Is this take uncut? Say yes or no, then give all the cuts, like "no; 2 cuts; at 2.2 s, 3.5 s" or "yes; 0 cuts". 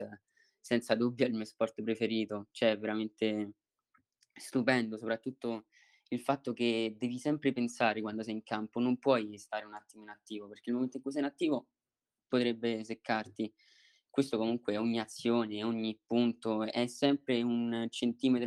yes; 0 cuts